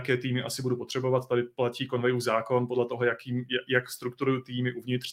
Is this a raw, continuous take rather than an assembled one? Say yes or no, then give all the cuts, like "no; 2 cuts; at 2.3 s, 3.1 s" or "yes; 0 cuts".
yes; 0 cuts